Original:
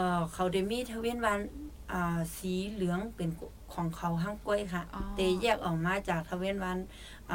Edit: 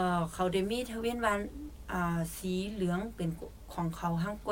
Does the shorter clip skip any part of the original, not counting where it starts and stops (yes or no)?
no